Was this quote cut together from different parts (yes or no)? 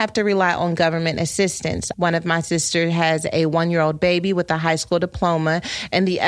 yes